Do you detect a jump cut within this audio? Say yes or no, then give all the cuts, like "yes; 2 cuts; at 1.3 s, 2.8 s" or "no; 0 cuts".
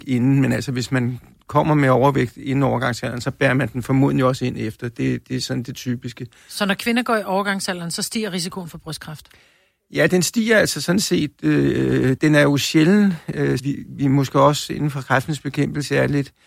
yes; 2 cuts; at 12.2 s, 13.6 s